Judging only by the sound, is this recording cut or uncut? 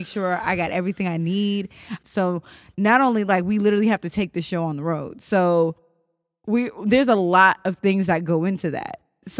cut